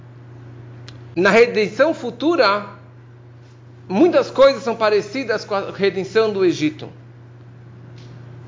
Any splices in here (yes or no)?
no